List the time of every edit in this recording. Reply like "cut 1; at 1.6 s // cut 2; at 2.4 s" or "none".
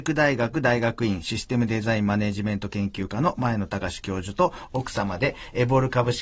none

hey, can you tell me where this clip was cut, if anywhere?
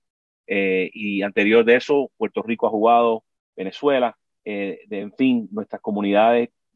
none

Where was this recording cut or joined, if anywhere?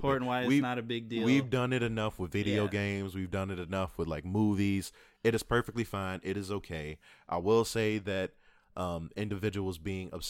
none

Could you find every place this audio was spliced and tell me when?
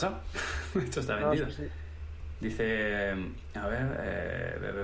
cut 1; at 2.3 s

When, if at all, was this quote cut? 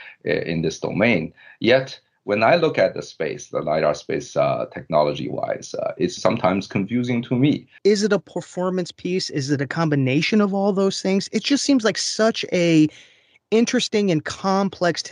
cut 1; at 6.2 s // cut 2; at 7.8 s

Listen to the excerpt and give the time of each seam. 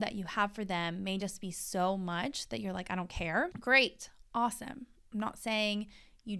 none

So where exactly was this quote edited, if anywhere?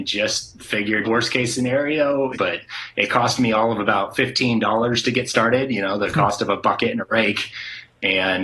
cut 1; at 1.0 s // cut 2; at 2.3 s

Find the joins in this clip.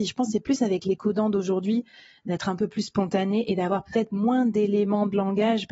none

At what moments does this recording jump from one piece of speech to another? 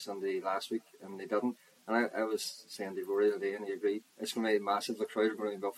cut 1; at 4.1 s

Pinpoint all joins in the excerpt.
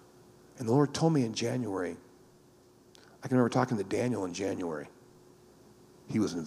none

